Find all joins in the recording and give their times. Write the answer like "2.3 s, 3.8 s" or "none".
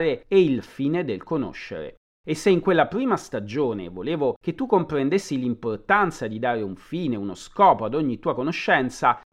none